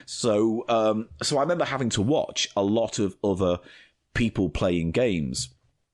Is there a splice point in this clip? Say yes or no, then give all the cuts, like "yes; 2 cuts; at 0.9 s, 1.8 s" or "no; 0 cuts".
no; 0 cuts